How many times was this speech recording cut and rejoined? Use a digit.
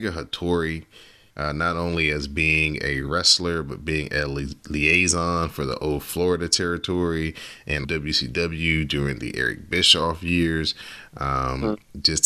2